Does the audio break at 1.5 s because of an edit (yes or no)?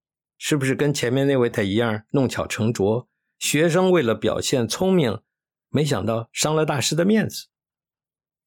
yes